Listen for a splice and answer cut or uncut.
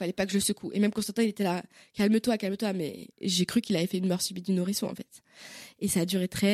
cut